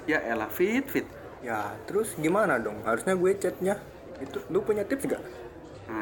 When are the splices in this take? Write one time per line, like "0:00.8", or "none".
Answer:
0:01.4